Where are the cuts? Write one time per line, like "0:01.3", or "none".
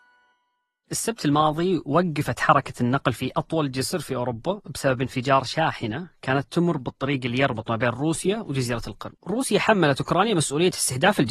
0:09.2